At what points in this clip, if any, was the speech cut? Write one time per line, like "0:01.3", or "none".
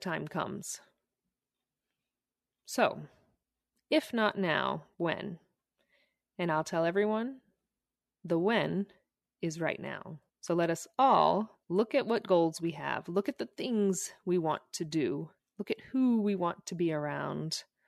0:10.3
0:11.6